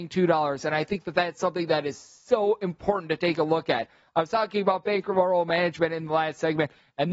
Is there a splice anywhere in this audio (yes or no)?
no